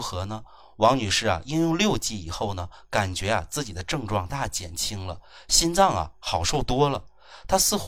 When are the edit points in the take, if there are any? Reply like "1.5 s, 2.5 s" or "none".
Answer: 4.3 s